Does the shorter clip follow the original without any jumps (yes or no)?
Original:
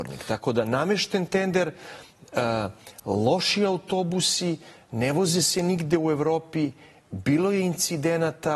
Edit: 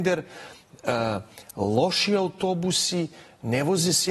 yes